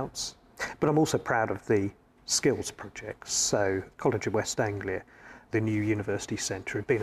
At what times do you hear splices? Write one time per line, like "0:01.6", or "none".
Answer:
none